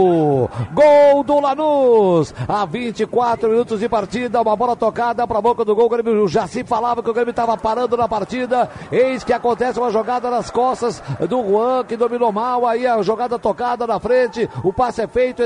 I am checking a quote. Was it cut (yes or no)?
no